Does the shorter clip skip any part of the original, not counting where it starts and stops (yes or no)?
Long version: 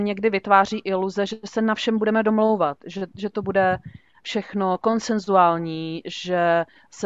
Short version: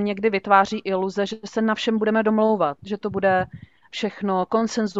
yes